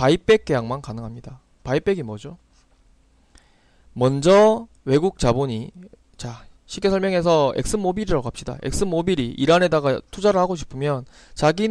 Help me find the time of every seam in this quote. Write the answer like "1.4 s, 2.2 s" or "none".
none